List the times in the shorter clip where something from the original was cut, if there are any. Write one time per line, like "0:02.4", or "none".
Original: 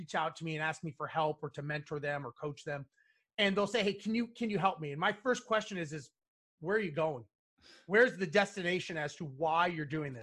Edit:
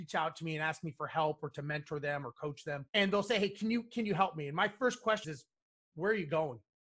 0:02.9
0:05.2